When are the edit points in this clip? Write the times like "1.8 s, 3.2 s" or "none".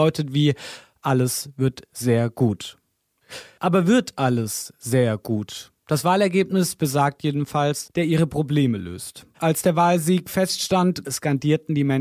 7.8 s, 9.3 s